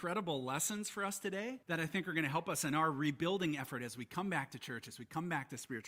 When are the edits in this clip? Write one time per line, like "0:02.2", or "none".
0:01.6